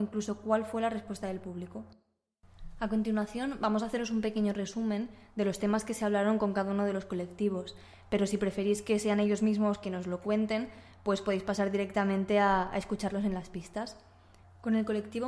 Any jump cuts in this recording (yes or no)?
no